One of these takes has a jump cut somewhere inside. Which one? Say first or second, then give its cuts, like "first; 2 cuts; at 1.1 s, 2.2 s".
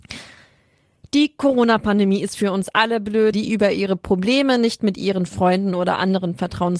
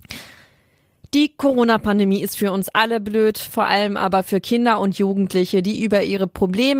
first; 1 cut; at 3.3 s